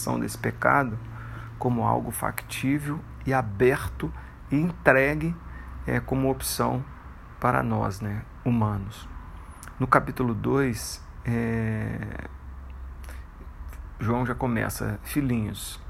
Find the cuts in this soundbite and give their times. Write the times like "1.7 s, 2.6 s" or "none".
none